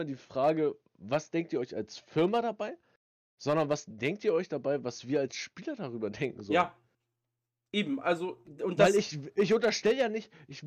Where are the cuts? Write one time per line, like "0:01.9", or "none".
none